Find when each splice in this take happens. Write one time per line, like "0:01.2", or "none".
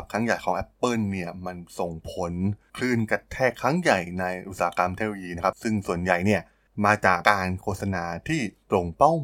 0:07.2

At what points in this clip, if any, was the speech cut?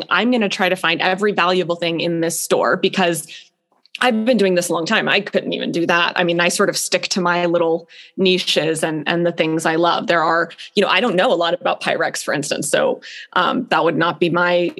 none

